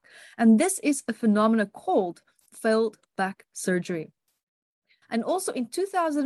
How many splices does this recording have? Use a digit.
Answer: 1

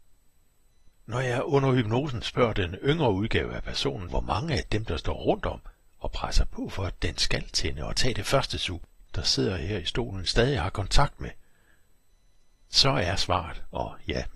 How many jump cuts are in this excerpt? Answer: 3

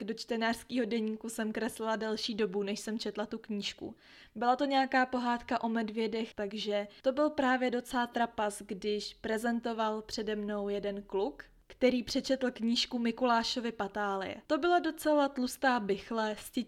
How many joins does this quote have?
2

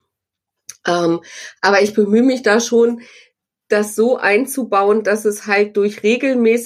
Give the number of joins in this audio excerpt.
0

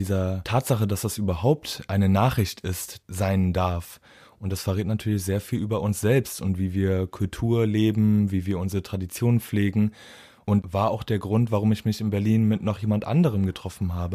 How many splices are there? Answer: 1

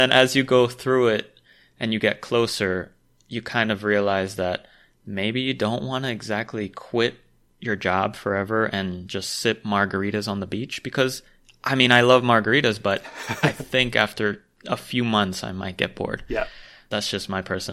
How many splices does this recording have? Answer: 0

